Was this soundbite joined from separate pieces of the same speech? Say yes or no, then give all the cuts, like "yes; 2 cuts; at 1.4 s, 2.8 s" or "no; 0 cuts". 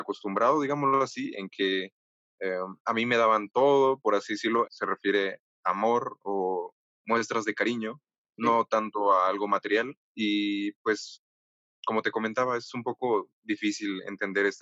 yes; 2 cuts; at 4.7 s, 10.1 s